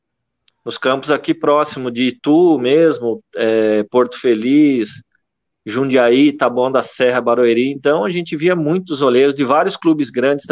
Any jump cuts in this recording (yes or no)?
no